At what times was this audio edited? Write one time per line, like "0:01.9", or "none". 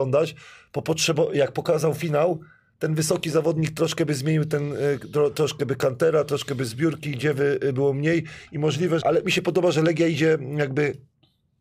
0:09.0